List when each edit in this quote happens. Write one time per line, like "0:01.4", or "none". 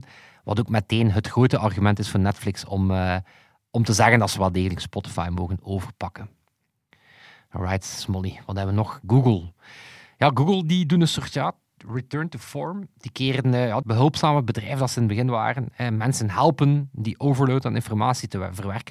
0:13.8